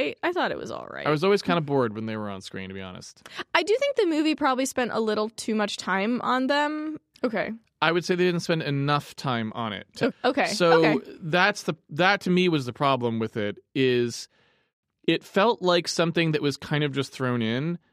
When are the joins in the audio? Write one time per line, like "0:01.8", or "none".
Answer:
0:07.1
0:10.1